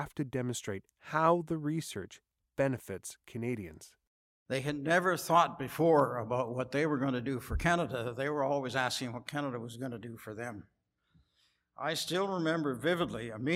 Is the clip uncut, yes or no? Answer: yes